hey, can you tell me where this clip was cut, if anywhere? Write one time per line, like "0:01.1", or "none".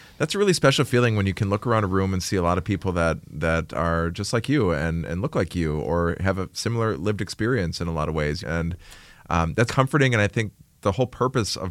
0:08.4
0:09.7